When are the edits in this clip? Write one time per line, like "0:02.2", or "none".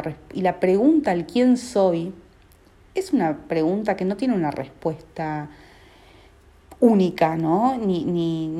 none